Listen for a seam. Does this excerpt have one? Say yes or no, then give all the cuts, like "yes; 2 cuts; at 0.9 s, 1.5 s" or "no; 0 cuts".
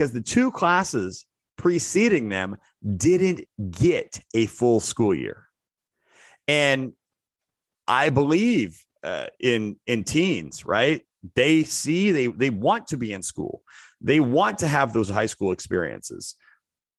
no; 0 cuts